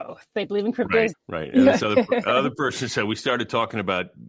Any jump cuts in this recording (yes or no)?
yes